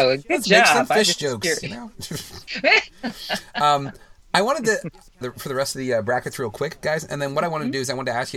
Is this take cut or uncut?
cut